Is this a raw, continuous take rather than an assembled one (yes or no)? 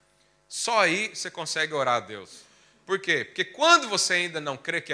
yes